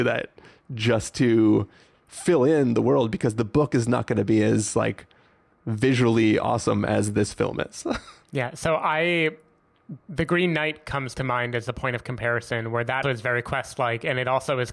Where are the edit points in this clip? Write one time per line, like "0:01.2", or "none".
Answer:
0:08.2
0:10.0
0:13.0

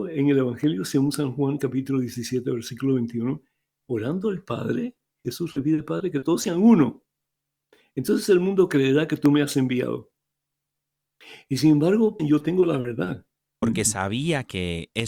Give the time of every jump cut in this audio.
0:12.2
0:13.6

